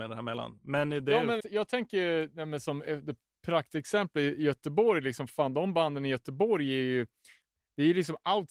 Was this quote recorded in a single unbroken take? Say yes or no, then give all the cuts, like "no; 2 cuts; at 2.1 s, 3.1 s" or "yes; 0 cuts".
no; 1 cut; at 1.4 s